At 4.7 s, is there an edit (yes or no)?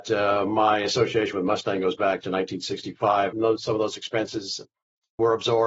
no